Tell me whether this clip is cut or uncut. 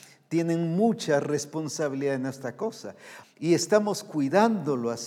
cut